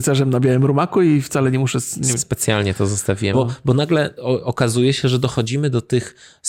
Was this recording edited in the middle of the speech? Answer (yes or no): yes